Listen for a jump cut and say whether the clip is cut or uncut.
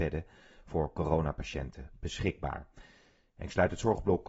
uncut